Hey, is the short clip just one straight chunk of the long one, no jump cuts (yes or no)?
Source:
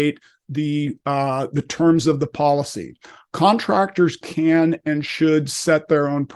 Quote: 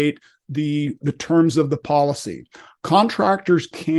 no